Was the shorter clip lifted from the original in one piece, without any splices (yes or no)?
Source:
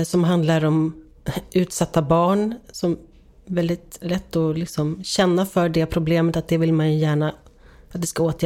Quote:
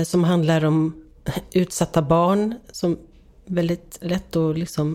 yes